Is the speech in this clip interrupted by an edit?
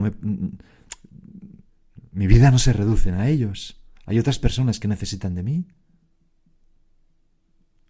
no; 0 cuts

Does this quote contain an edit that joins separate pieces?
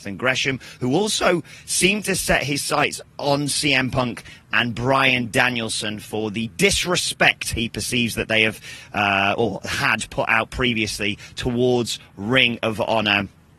yes; 1 cut; at 3.0 s

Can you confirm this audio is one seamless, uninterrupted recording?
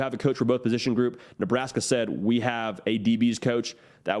yes; 0 cuts

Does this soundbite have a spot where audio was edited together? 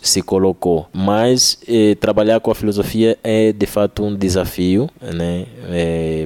no; 0 cuts

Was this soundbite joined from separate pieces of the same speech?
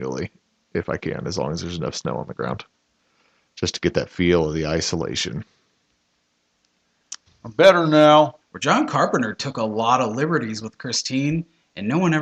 yes; 2 cuts; at 7.3 s, 8.4 s

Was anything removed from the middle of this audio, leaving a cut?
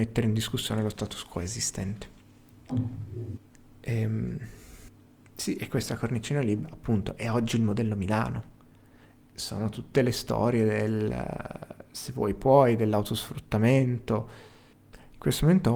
no; 0 cuts

